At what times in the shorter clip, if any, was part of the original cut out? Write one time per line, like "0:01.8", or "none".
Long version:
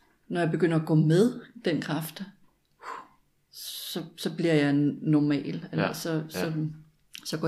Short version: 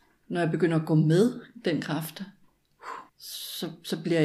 0:03.1